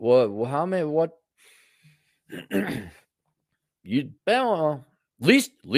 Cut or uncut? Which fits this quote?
cut